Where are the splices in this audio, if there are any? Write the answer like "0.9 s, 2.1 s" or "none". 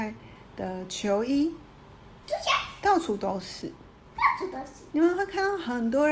2.2 s, 4.9 s